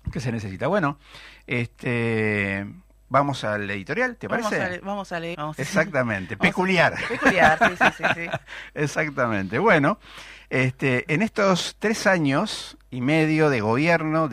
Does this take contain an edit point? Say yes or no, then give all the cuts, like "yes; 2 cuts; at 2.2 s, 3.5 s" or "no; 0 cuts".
yes; 1 cut; at 5.3 s